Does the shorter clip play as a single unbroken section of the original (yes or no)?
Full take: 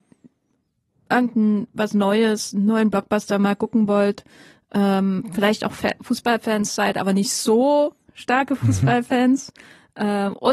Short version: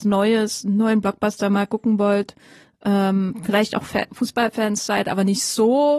yes